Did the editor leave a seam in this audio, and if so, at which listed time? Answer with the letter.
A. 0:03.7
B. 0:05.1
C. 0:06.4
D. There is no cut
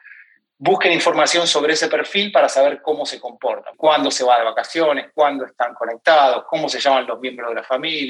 A